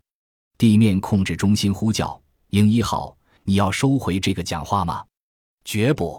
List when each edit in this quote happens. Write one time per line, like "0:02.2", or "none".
0:03.4